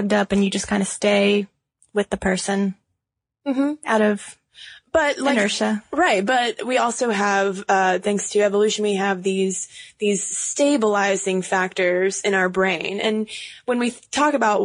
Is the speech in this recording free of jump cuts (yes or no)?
yes